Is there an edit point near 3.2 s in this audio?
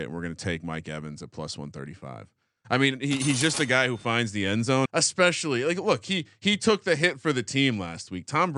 no; 1 cut; at 4.9 s

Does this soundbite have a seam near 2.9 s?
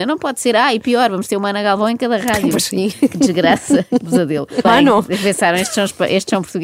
no; 1 cut; at 4.6 s

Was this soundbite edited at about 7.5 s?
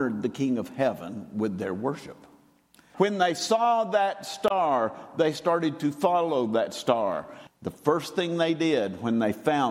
yes; 2 cuts; at 2.9 s, 7.5 s

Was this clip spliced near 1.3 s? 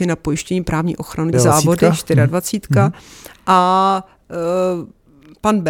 yes; 1 cut; at 1.3 s

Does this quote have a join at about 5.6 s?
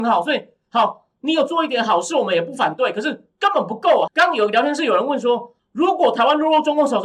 yes; 2 cuts; at 4.1 s, 5.6 s

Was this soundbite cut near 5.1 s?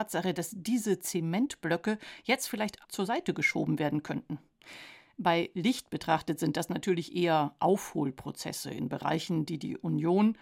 no; 1 cut; at 2.8 s

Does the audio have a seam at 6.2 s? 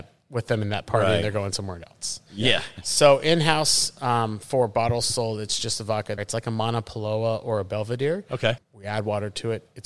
yes; 3 cuts; at 2.8 s, 6.2 s, 8.6 s

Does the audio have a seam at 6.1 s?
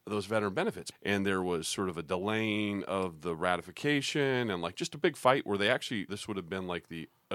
yes; 2 cuts; at 0.9 s, 6.1 s

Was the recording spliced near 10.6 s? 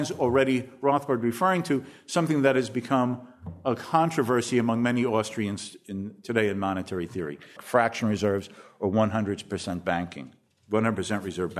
no; 1 cut; at 7.6 s

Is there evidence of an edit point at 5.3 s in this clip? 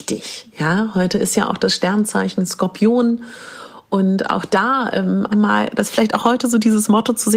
yes; 1 cut; at 5.3 s

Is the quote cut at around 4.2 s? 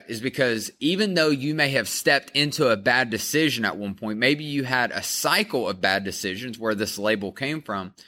no; 0 cuts

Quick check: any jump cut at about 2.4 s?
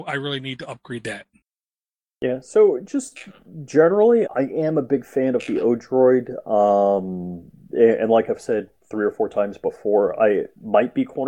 no; 1 cut; at 4.2 s

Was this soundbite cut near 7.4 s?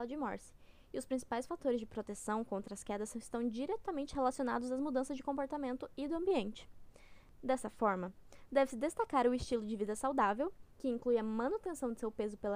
yes; 1 cut; at 7.4 s

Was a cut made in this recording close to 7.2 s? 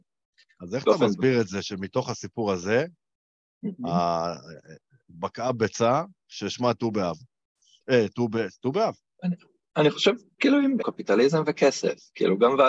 no; 2 cuts; at 9.2 s, 10.8 s

